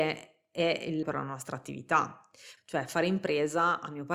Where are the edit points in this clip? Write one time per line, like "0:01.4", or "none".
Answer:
0:01.0
0:02.6